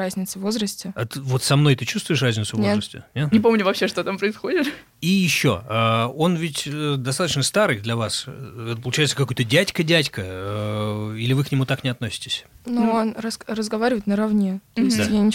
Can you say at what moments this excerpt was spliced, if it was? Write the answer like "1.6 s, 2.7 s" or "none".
3.3 s, 12.5 s